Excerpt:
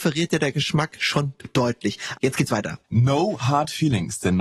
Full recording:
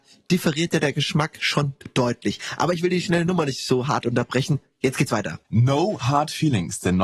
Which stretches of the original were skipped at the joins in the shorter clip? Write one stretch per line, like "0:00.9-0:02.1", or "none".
0:02.6-0:04.8